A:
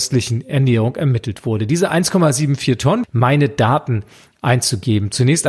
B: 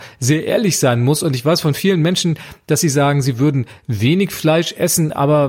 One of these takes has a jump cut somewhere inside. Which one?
A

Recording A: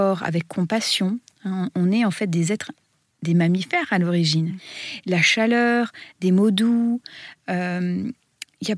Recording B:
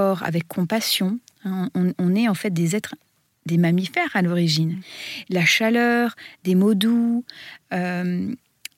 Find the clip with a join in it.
A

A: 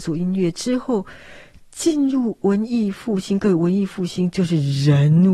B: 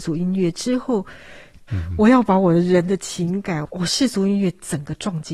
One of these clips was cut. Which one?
B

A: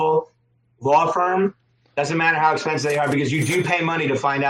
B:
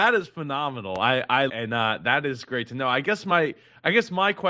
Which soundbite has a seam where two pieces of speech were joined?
B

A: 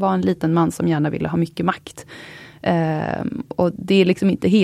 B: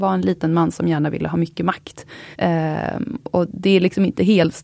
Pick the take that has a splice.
B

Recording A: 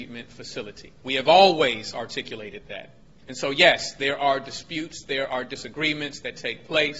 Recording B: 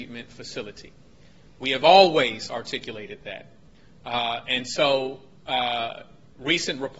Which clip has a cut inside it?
A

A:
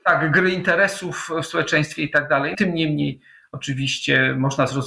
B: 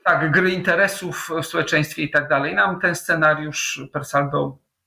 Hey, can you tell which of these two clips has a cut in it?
A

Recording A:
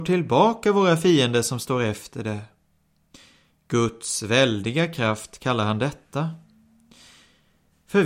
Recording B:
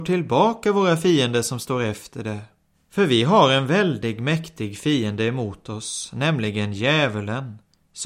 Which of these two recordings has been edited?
B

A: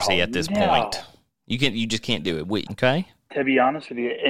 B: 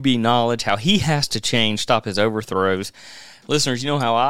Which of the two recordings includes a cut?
A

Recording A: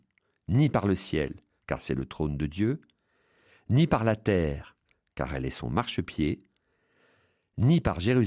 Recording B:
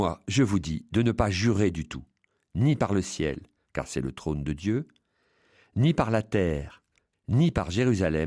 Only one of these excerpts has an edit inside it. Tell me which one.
B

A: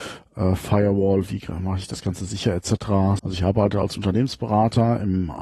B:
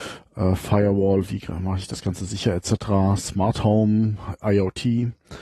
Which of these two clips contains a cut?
A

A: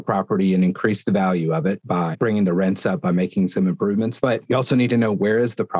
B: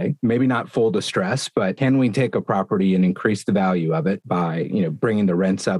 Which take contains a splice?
A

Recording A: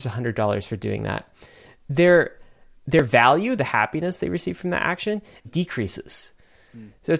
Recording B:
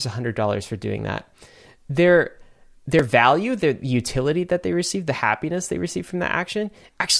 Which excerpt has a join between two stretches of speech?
A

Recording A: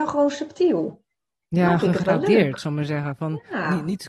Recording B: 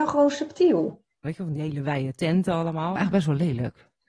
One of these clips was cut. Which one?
B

